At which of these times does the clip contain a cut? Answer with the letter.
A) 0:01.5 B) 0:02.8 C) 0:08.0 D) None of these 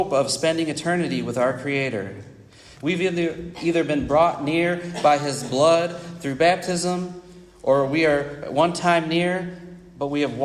B